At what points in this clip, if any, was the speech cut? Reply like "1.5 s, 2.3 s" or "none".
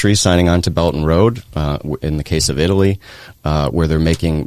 none